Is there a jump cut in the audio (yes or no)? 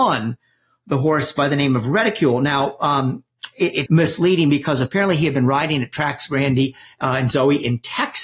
yes